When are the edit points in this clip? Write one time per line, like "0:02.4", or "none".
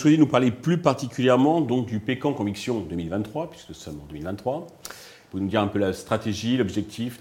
none

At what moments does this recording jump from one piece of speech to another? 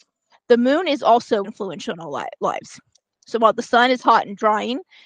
0:01.4
0:03.0

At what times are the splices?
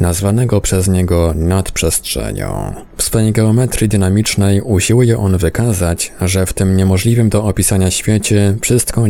none

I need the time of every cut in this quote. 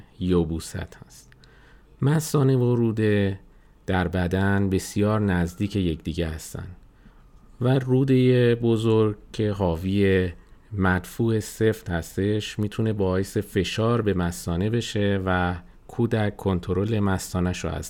none

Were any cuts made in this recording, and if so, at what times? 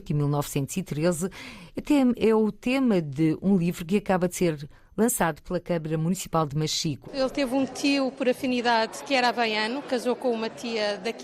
0:07.0

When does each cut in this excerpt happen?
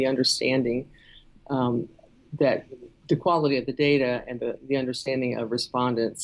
none

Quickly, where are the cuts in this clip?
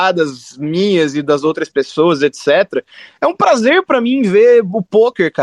none

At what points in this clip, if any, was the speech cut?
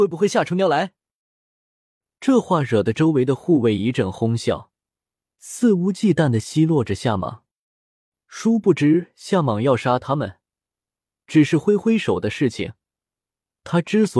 0:05.3

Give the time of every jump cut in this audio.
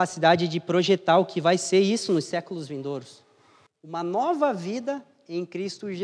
0:03.7

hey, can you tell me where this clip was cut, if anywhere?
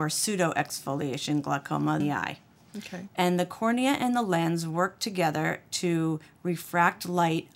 0:02.0
0:03.1

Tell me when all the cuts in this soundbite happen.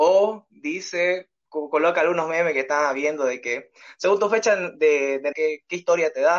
0:01.4
0:05.3

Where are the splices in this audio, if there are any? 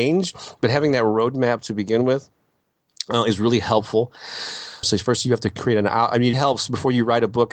0:04.8
0:06.3

